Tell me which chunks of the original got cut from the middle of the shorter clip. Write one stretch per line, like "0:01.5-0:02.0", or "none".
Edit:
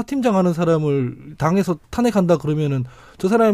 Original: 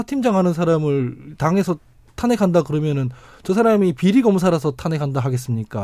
0:01.8-0:02.1